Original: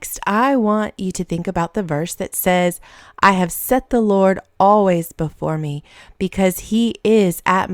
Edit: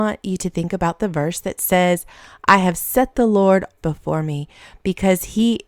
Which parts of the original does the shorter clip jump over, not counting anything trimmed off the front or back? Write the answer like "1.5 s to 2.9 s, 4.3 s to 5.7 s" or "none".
4.5 s to 5.1 s